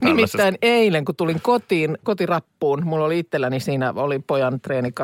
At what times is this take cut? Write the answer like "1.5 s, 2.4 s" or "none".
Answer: 2.0 s